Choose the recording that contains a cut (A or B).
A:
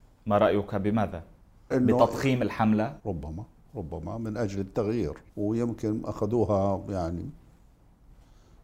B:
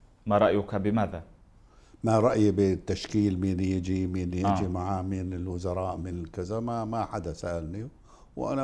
A